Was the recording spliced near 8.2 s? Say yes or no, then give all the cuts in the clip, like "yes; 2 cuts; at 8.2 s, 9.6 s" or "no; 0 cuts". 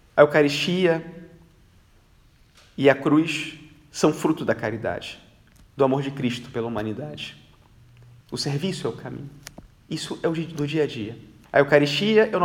yes; 2 cuts; at 8.2 s, 11.4 s